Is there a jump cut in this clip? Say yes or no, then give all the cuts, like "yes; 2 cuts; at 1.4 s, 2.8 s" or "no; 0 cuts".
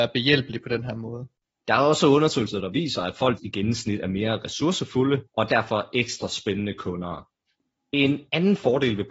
yes; 3 cuts; at 1.6 s, 3.4 s, 5.3 s